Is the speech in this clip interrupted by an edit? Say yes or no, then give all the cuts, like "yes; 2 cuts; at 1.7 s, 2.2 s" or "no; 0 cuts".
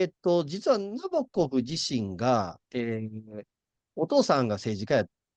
no; 0 cuts